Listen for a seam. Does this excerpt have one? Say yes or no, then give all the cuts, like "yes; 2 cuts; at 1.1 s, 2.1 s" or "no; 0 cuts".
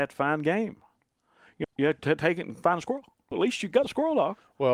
yes; 2 cuts; at 1.6 s, 3.3 s